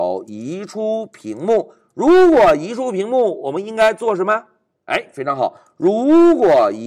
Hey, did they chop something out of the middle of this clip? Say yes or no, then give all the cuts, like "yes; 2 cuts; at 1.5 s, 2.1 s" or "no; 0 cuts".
no; 0 cuts